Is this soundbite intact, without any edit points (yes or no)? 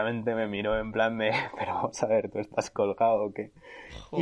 yes